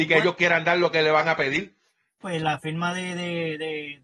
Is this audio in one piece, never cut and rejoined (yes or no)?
no